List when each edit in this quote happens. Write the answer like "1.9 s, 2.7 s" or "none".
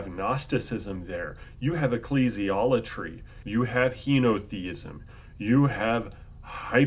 3.4 s

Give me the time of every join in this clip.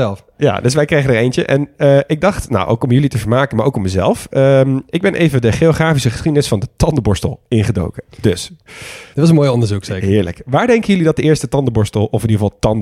none

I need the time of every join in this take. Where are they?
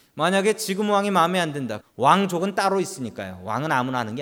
1.8 s

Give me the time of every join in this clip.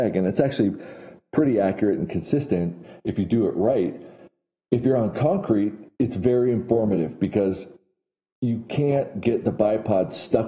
5.9 s

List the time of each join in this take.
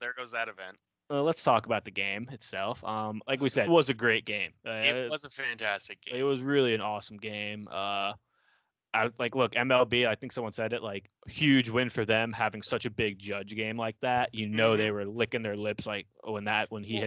3.7 s

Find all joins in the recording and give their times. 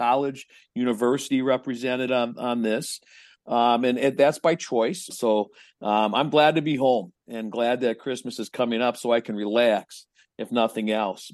5.1 s

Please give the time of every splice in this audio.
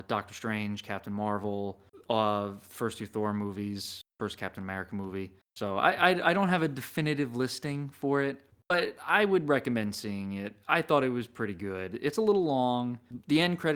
none

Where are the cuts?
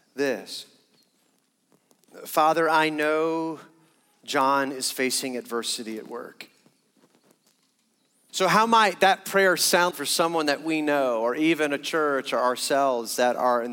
8.3 s, 9.9 s

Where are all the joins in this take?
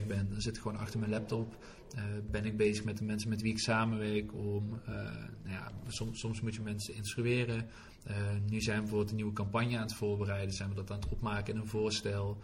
none

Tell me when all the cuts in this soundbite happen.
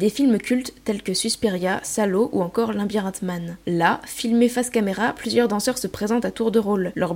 none

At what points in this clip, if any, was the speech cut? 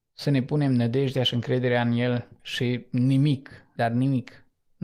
2.4 s, 3.8 s

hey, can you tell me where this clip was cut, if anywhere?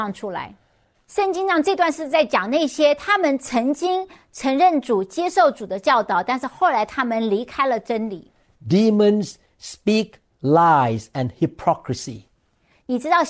0.9 s

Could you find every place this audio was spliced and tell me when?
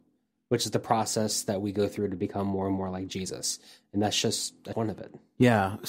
4.7 s

